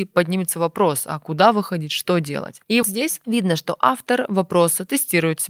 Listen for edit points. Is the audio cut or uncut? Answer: cut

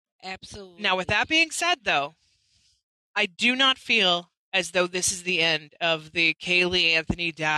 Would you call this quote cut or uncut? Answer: uncut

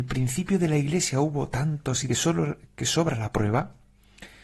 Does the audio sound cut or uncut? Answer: cut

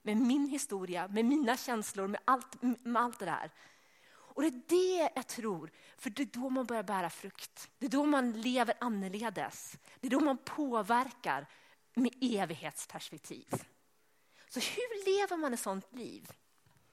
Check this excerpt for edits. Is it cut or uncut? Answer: cut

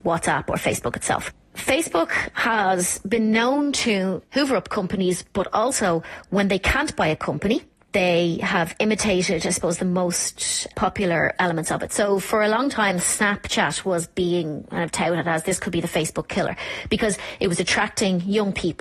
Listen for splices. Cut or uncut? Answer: uncut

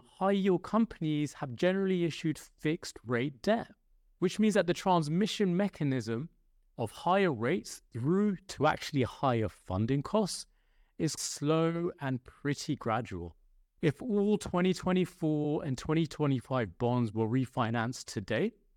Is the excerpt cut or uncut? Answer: cut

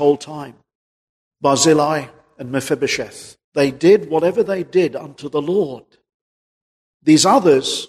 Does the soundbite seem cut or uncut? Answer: cut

